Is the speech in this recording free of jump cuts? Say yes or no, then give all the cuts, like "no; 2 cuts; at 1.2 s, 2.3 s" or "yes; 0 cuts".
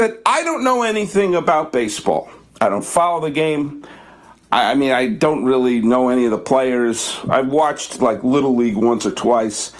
yes; 0 cuts